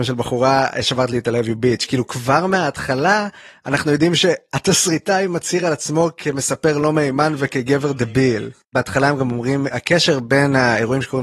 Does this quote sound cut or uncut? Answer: cut